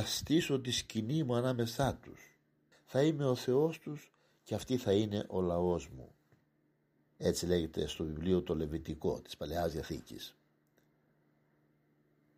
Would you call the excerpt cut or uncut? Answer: cut